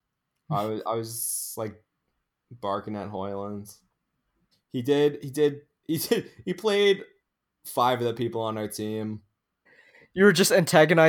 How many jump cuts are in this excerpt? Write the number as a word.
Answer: two